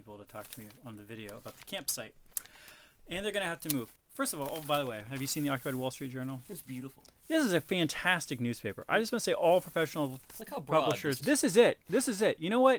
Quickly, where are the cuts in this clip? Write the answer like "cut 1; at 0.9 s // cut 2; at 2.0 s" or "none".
cut 1; at 3.9 s // cut 2; at 11.2 s